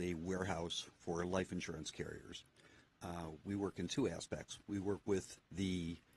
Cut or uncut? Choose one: uncut